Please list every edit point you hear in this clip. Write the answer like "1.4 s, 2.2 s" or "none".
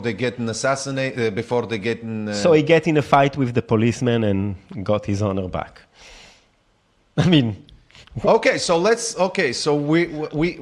none